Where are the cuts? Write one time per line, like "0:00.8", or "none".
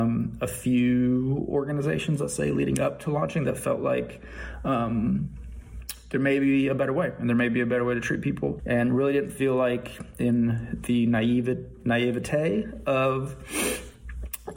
0:08.6